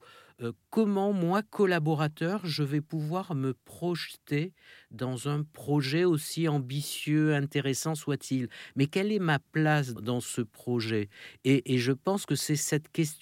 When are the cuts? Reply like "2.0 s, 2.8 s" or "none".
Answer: 10.0 s